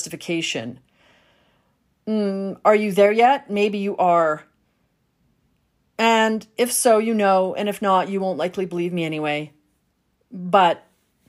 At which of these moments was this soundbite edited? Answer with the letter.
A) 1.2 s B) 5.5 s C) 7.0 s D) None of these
D